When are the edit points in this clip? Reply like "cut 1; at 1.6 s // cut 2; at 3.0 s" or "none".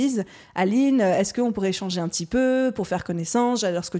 none